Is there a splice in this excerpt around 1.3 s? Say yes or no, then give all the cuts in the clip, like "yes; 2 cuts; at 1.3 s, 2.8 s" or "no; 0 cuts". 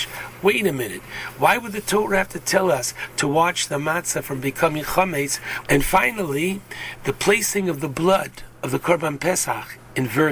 no; 1 cut; at 5.6 s